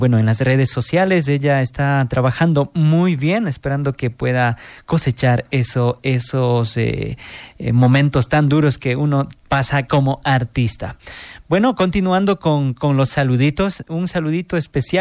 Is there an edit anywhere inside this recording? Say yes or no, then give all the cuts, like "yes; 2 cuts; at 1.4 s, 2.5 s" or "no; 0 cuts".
no; 0 cuts